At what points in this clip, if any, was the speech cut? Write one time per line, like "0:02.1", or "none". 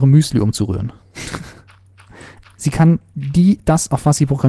0:02.4

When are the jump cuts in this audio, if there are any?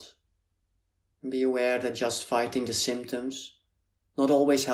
0:01.1

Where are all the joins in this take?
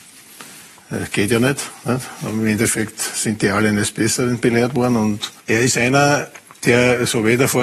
0:05.4

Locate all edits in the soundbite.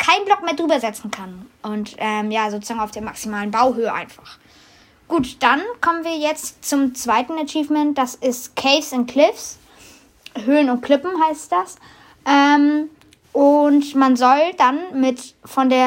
none

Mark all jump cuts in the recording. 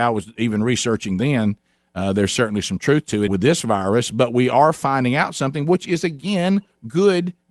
0:03.3

